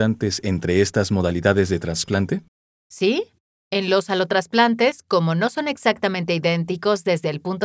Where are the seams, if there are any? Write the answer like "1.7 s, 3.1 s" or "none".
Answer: none